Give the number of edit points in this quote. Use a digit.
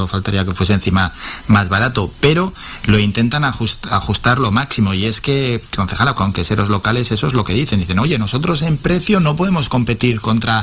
1